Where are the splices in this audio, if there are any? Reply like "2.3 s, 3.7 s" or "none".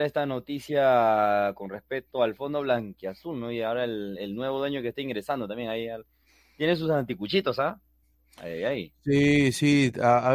none